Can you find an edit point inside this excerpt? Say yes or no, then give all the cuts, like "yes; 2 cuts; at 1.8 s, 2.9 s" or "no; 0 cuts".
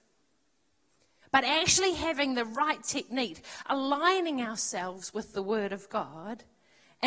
yes; 1 cut; at 1.2 s